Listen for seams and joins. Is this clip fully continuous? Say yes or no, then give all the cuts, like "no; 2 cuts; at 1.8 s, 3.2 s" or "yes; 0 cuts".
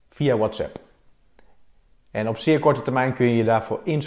yes; 0 cuts